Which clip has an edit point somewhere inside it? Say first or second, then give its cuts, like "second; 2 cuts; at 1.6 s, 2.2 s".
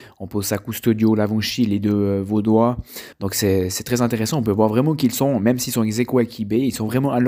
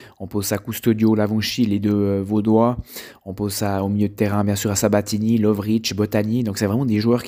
first; 1 cut; at 3.1 s